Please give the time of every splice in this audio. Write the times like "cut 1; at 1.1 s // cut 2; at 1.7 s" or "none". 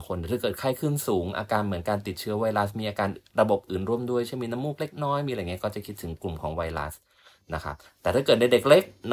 none